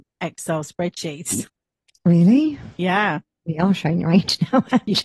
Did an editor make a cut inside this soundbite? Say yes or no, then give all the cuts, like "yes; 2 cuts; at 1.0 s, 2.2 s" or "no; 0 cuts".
no; 0 cuts